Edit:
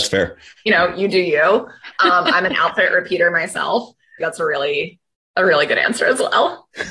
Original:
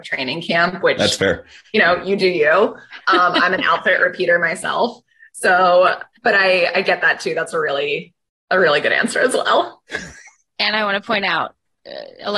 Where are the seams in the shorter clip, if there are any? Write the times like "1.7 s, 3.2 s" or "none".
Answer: 4.2 s

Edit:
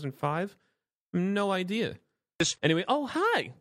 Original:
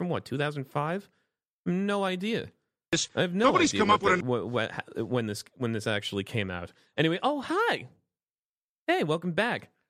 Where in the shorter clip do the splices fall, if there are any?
2.6 s

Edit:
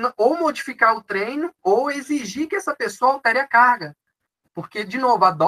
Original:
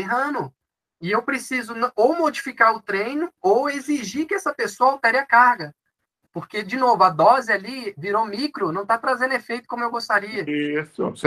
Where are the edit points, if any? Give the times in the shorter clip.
none

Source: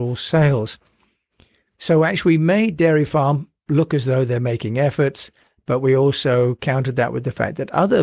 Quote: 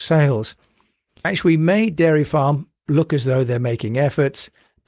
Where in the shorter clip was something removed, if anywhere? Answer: 1.2 s

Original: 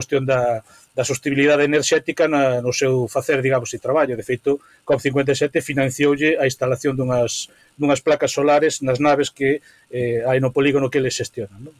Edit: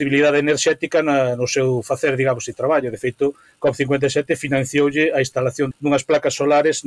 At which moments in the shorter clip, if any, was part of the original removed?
5.7 s

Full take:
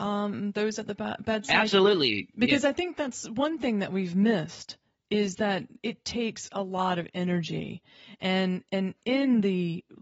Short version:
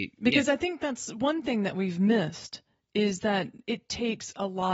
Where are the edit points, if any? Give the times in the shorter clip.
none

